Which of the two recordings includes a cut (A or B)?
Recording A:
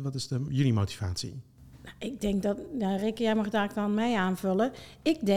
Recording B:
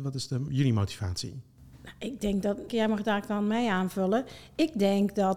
B